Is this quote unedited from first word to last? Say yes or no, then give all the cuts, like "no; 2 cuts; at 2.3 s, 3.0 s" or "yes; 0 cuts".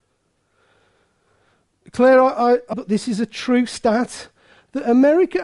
no; 1 cut; at 2.7 s